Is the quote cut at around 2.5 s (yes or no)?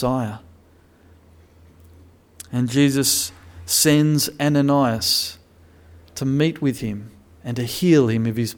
no